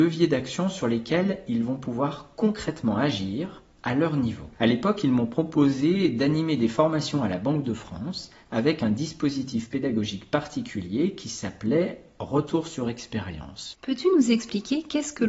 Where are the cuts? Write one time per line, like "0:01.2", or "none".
0:04.5
0:13.7